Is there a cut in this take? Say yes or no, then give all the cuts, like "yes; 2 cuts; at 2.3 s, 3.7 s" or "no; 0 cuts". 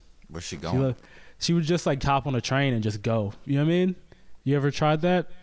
no; 0 cuts